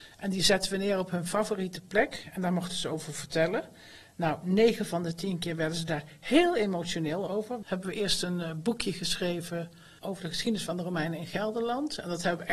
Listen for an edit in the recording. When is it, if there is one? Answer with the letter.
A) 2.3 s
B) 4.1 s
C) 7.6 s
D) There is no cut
C